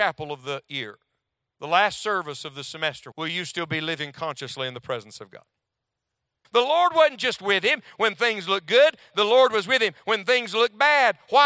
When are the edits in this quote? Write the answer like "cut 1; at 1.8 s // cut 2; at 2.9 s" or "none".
cut 1; at 3.1 s // cut 2; at 6.4 s

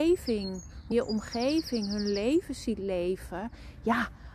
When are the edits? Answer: cut 1; at 0.9 s

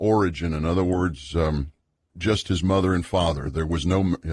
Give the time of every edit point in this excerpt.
cut 1; at 2.1 s

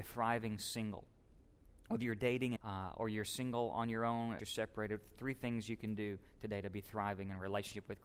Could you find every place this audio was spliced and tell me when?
cut 1; at 2.6 s // cut 2; at 4.4 s

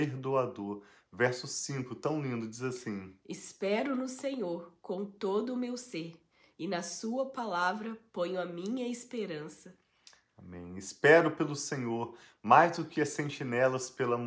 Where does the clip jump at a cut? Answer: none

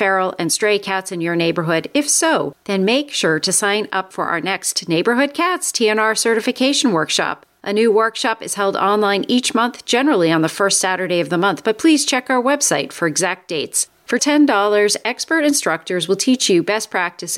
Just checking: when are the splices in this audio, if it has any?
cut 1; at 14.2 s

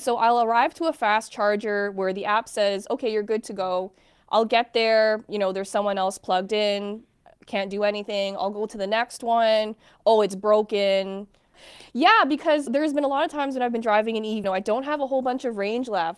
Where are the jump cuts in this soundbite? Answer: cut 1; at 11.5 s // cut 2; at 12.7 s // cut 3; at 14.4 s

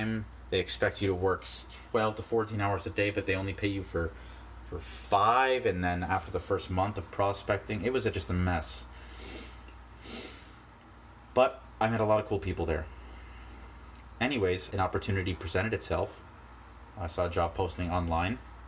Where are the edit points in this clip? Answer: cut 1; at 14.7 s

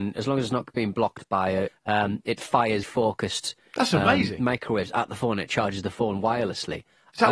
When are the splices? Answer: cut 1; at 1.7 s // cut 2; at 2.8 s

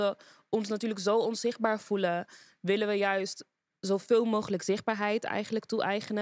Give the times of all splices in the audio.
none

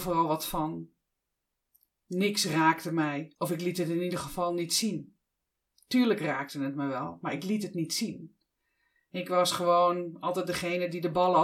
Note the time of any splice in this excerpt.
cut 1; at 1.9 s

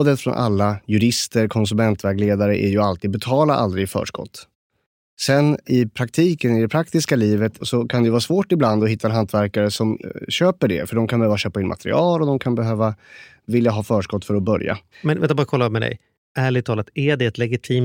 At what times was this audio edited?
cut 1; at 7.6 s

